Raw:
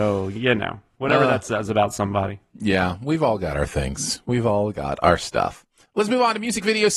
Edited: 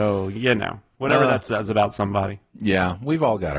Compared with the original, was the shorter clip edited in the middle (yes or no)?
no